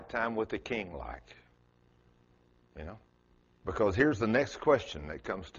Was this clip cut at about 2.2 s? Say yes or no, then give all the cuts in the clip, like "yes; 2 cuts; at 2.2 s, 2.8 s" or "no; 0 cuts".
no; 1 cut; at 3.6 s